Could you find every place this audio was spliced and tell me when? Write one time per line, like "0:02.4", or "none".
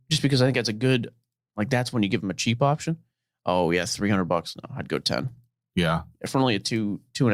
none